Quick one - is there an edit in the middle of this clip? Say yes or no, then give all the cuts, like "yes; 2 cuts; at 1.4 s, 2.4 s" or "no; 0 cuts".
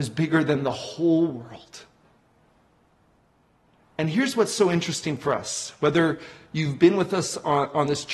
no; 0 cuts